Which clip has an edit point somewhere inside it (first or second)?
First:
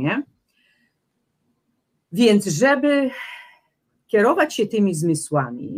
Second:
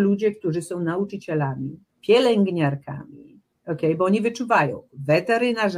second